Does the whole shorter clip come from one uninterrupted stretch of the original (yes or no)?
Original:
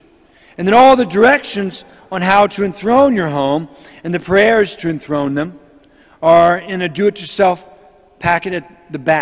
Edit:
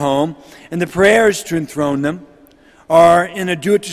yes